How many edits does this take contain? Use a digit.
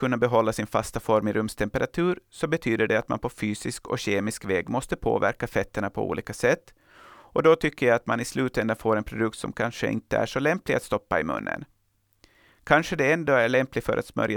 0